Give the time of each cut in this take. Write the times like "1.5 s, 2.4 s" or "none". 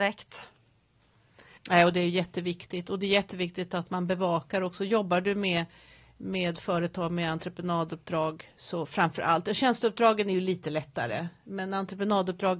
1.6 s